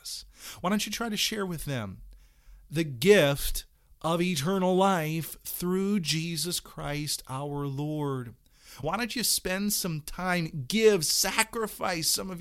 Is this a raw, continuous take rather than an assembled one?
no; 1 cut; at 8.8 s

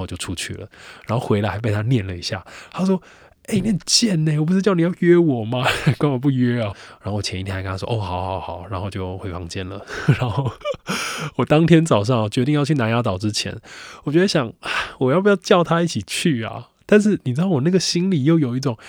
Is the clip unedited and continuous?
no; 1 cut; at 6.7 s

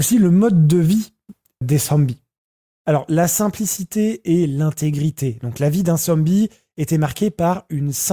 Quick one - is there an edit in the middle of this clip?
yes; 1 cut; at 1.6 s

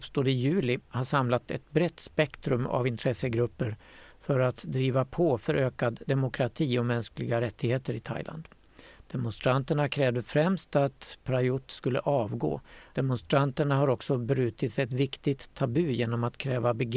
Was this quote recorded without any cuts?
no; 1 cut; at 12.9 s

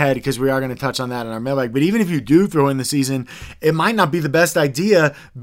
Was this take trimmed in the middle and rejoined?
no; 0 cuts

